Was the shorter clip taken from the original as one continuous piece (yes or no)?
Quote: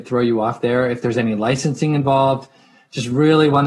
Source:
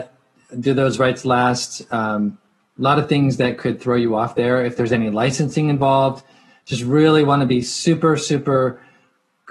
yes